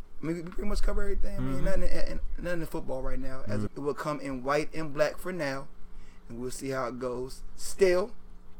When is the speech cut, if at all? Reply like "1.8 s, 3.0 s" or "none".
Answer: 3.7 s